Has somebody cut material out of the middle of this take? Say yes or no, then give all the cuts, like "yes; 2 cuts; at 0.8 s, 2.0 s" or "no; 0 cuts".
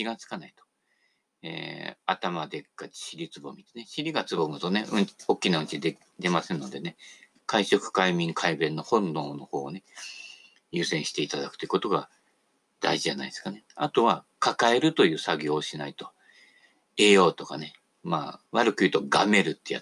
yes; 1 cut; at 18.5 s